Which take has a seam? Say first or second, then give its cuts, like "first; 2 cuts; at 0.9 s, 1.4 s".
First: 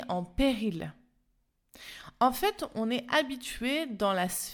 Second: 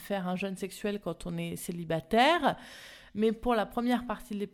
second; 1 cut; at 3.1 s